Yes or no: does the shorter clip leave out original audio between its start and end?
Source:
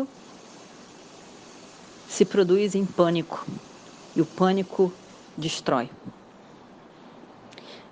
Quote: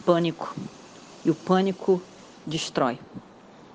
no